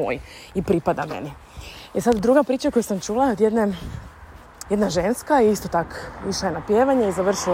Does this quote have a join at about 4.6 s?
yes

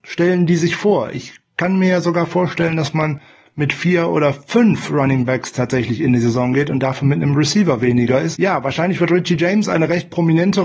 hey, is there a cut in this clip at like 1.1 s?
no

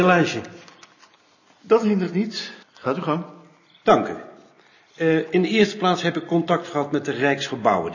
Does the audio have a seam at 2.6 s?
yes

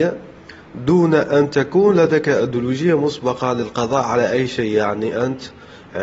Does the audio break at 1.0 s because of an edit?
no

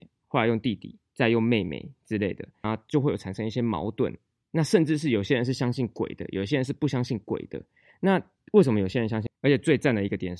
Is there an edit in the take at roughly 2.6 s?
yes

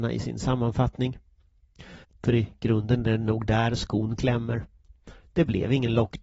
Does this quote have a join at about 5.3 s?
no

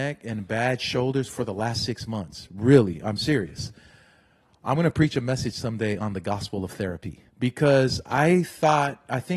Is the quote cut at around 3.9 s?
no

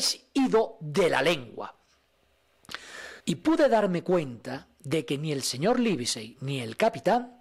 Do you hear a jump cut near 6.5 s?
no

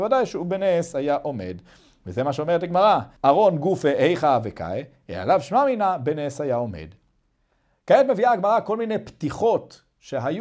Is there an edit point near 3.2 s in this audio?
yes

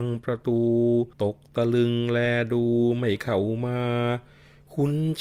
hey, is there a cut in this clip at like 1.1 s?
yes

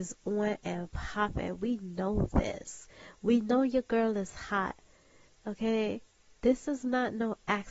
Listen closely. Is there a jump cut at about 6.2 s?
no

